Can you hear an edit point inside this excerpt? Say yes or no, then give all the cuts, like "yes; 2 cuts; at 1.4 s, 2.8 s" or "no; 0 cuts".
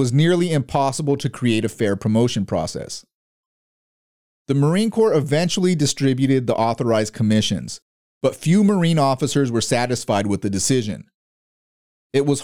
no; 0 cuts